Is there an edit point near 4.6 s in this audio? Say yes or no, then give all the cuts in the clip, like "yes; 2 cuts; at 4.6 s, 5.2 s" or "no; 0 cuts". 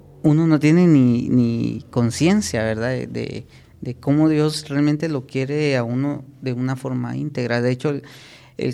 no; 0 cuts